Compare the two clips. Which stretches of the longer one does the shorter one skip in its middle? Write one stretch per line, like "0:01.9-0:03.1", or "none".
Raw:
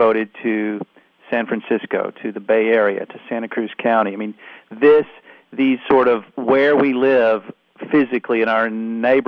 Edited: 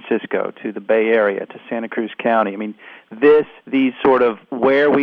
0:05.2-0:05.5